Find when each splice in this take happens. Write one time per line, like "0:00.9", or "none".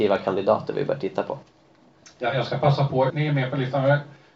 0:03.1

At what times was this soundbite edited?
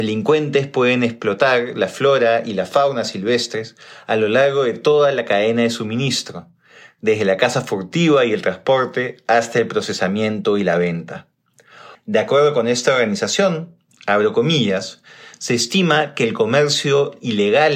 0:11.9

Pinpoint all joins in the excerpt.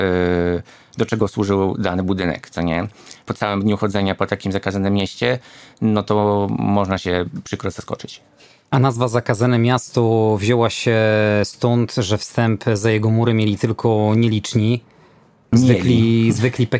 0:03.2

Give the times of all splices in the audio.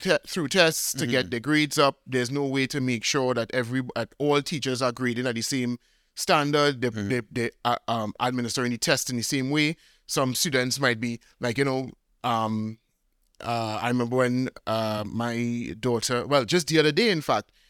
none

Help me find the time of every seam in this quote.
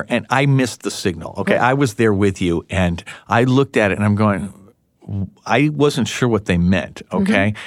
none

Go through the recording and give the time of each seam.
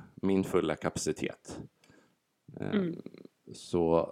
none

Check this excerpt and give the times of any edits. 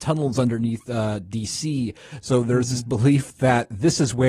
none

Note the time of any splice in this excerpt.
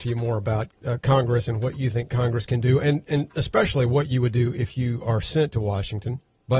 none

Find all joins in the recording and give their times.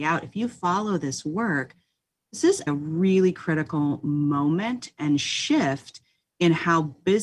0:02.7

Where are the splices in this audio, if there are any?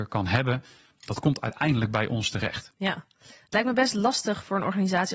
none

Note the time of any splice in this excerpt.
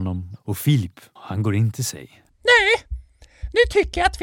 0:01.2
0:02.3

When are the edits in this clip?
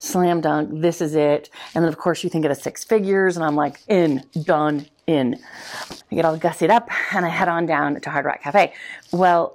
0:06.0

